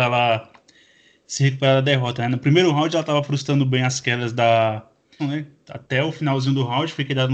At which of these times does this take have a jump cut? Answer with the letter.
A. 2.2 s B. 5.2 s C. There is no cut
B